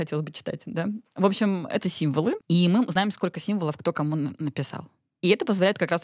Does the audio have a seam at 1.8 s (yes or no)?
yes